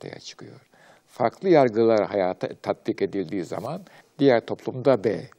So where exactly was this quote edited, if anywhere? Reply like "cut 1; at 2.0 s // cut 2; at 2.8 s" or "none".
cut 1; at 4.0 s